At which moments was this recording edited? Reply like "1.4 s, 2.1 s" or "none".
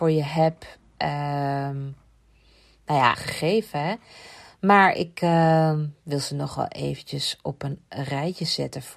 3.1 s